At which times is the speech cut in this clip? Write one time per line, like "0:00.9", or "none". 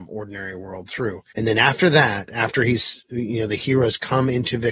0:01.3